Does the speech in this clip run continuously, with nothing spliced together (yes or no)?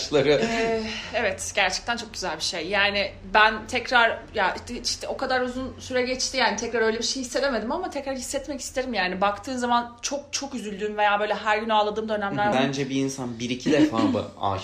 no